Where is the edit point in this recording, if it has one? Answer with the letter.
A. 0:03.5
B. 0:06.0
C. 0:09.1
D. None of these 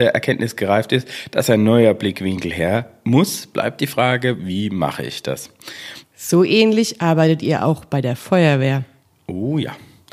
B